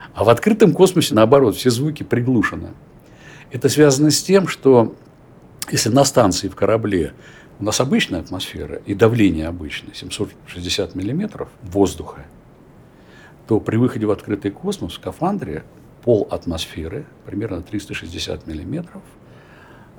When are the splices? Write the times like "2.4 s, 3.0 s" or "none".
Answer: 11.6 s